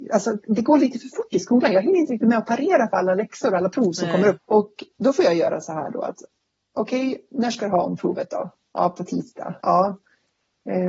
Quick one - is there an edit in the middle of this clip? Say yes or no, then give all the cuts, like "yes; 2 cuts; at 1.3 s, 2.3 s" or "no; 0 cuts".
yes; 2 cuts; at 4.4 s, 9.6 s